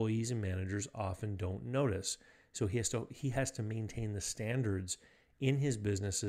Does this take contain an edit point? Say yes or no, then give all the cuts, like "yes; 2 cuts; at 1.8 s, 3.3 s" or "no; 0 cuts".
no; 0 cuts